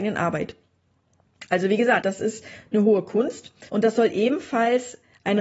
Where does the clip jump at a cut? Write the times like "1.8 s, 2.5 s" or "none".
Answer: 2.0 s, 3.7 s